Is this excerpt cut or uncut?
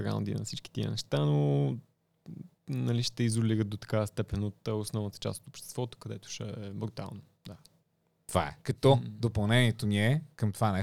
cut